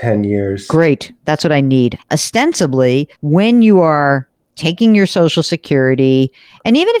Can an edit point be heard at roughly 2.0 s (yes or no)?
yes